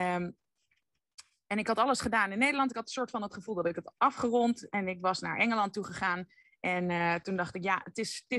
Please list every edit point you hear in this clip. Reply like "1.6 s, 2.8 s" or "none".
none